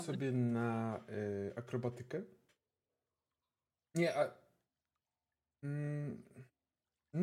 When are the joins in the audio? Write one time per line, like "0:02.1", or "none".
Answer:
none